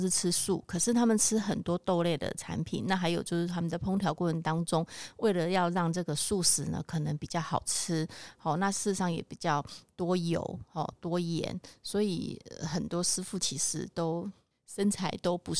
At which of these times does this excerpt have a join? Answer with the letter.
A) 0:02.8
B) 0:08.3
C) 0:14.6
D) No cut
D